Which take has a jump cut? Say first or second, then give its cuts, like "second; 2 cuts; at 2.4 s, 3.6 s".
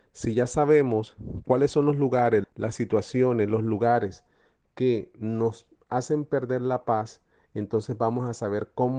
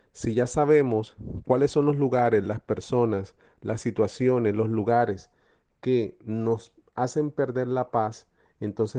first; 1 cut; at 2.4 s